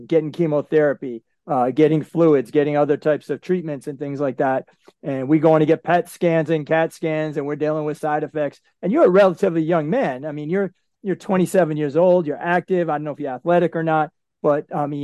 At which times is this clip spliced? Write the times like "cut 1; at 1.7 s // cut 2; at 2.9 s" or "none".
none

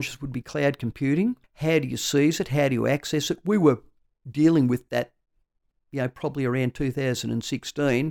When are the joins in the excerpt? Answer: cut 1; at 1.4 s

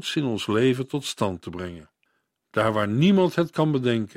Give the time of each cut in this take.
none

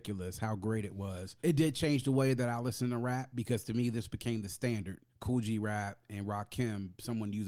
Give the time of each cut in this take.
cut 1; at 1.4 s // cut 2; at 5.1 s

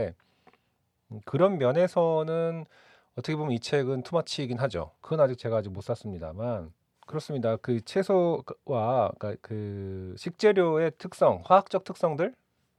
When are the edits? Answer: cut 1; at 5.0 s

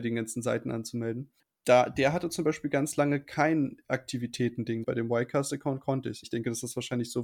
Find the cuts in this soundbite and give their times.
cut 1; at 4.8 s // cut 2; at 6.2 s

